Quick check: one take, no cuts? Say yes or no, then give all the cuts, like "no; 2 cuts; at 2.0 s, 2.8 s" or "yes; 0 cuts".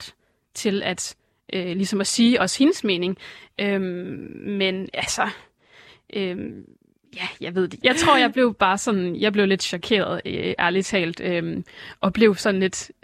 no; 1 cut; at 7.8 s